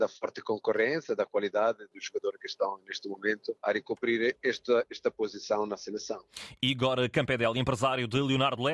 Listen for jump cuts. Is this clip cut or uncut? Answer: cut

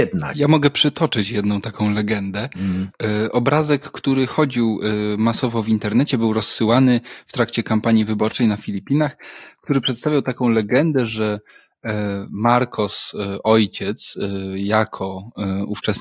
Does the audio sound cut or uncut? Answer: uncut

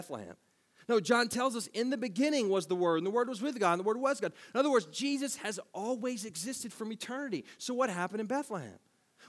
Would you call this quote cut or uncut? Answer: uncut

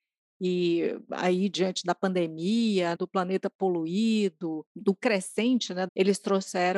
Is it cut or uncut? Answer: cut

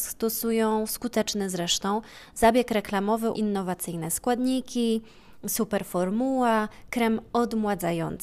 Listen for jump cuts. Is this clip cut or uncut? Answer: cut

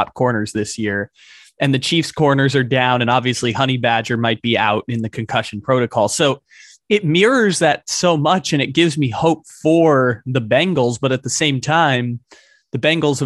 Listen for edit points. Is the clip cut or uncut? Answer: uncut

